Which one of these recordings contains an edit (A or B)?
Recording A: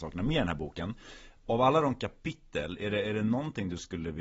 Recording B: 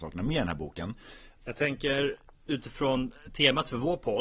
B